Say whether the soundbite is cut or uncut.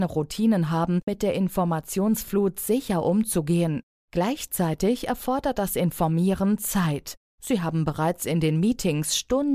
cut